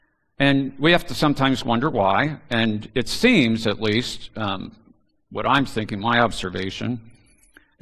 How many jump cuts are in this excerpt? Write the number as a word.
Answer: zero